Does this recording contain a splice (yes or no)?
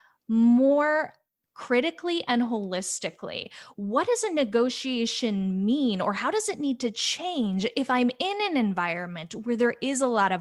no